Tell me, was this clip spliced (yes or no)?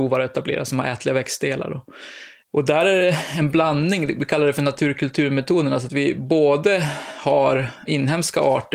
yes